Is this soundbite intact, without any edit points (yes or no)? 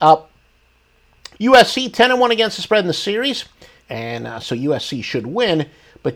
no